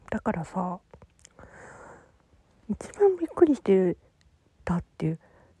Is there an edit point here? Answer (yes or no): no